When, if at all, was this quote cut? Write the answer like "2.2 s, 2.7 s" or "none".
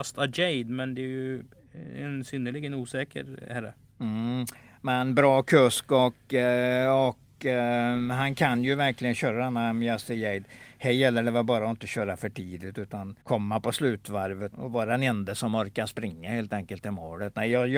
13.2 s, 14.5 s